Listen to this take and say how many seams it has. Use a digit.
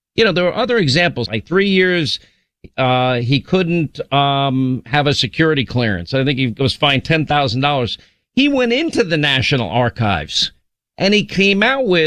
1